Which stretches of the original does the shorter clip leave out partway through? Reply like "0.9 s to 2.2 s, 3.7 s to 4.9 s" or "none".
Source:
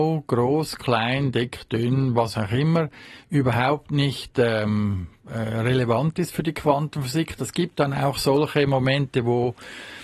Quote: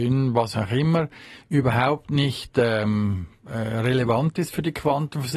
none